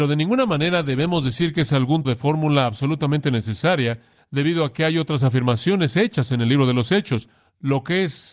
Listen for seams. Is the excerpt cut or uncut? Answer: cut